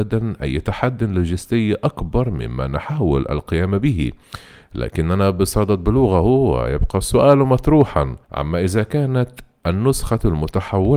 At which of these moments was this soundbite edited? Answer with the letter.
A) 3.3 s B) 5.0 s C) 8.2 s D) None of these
C